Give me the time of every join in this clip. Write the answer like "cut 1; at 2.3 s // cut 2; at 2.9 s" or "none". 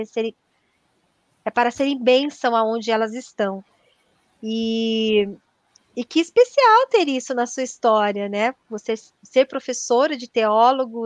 none